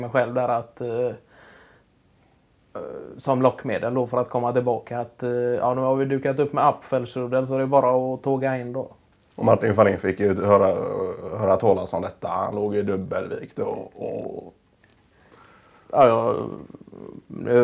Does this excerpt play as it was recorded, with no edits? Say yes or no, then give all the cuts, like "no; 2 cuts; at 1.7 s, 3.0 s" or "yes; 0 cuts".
yes; 0 cuts